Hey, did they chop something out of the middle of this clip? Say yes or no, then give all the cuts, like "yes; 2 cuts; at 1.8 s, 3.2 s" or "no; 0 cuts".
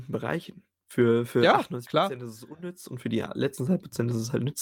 no; 0 cuts